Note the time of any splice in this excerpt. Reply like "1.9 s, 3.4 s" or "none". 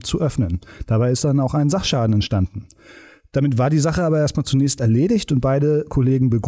none